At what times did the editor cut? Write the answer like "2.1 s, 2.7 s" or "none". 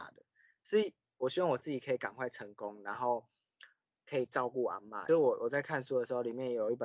none